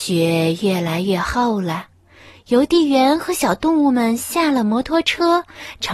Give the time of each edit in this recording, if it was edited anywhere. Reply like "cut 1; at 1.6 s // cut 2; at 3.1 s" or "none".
none